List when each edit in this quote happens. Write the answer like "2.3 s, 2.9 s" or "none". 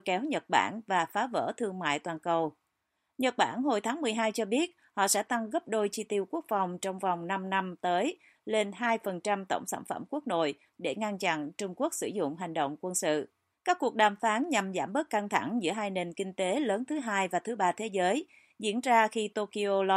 10.7 s, 13.5 s